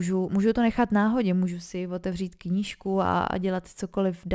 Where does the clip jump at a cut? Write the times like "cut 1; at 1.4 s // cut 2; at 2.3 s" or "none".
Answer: none